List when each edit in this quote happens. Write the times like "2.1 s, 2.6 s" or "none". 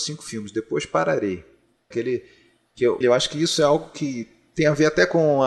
1.9 s, 3.0 s